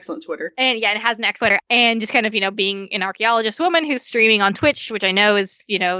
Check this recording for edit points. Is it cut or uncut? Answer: uncut